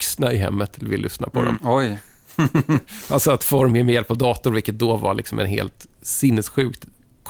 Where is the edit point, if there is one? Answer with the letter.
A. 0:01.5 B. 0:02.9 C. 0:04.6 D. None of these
A